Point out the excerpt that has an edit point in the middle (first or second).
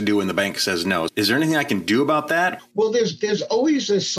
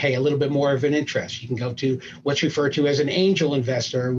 first